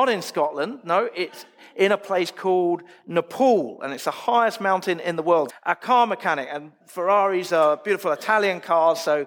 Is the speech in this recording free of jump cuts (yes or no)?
no